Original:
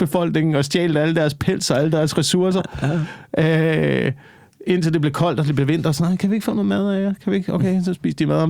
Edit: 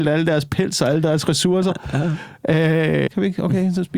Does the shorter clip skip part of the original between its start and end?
yes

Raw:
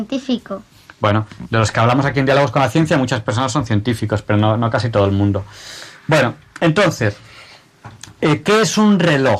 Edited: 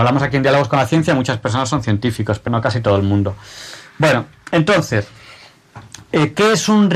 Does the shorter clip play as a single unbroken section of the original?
no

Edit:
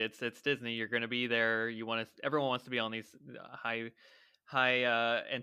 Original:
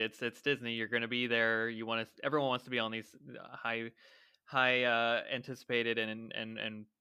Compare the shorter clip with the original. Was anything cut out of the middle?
no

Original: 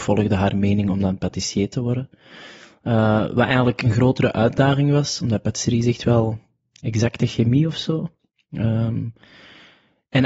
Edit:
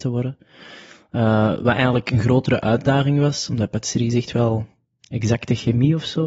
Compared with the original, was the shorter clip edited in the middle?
no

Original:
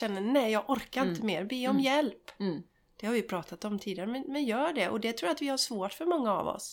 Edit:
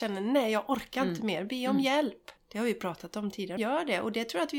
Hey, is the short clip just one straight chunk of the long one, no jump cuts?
no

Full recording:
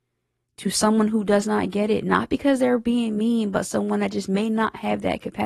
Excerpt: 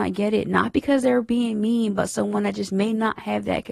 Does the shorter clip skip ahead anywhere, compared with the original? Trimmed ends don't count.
no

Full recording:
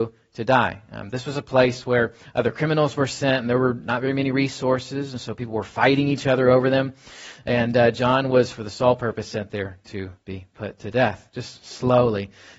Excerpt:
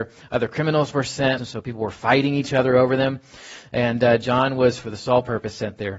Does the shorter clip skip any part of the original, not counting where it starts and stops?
yes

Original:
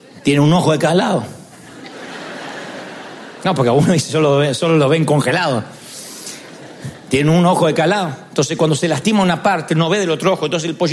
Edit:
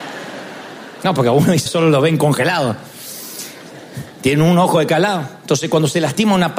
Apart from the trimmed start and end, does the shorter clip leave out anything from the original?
yes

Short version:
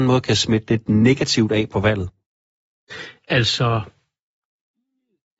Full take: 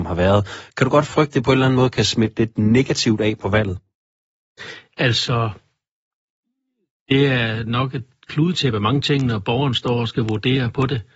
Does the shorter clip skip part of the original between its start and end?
no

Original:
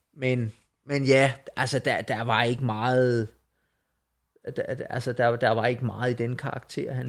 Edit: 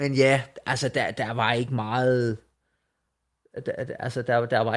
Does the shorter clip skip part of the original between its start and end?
no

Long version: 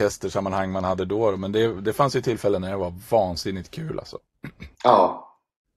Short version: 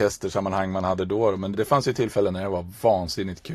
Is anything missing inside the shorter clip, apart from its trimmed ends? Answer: yes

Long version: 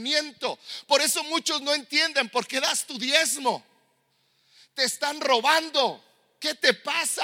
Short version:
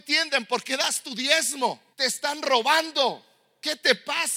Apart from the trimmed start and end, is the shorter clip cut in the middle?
yes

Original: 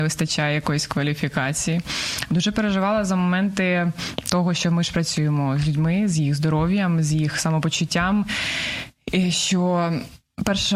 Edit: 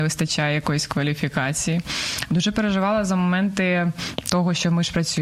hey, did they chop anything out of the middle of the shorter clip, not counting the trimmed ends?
no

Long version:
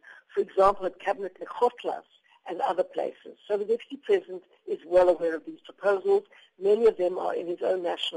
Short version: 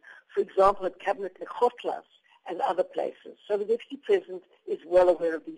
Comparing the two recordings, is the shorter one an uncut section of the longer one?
yes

